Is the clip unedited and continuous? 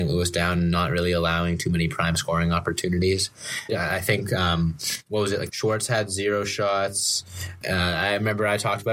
no; 3 cuts; at 3.7 s, 5.5 s, 7.6 s

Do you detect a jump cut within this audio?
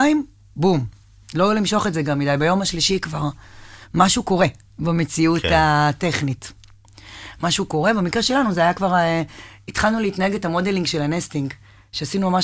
no; 0 cuts

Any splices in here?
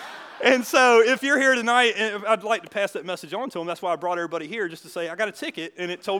no; 0 cuts

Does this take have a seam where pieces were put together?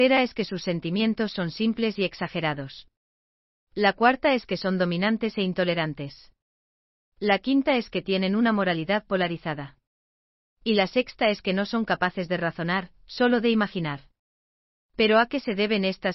no; 0 cuts

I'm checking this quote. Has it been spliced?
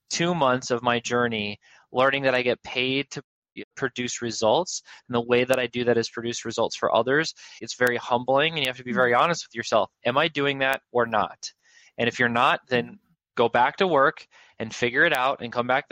yes; 1 cut; at 7.6 s

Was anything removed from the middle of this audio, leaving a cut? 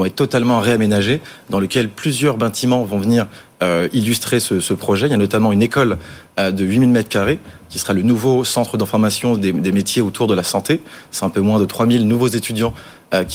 no; 0 cuts

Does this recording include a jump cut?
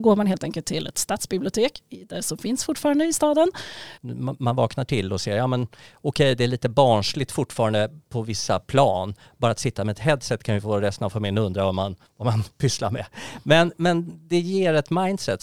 yes; 1 cut; at 4.0 s

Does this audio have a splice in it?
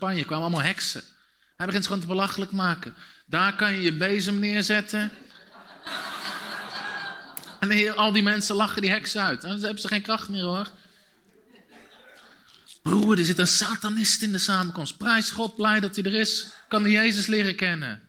yes; 1 cut; at 3.1 s

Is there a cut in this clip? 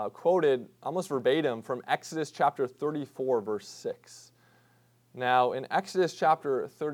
no; 0 cuts

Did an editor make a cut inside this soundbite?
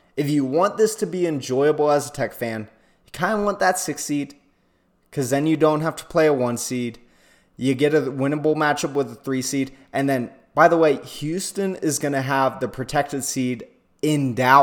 no; 0 cuts

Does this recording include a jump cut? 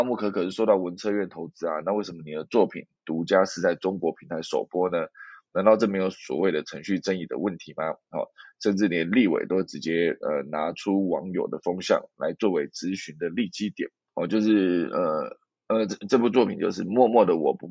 yes; 1 cut; at 15.9 s

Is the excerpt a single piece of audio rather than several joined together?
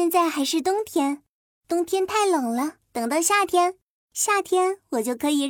no; 1 cut; at 2.8 s

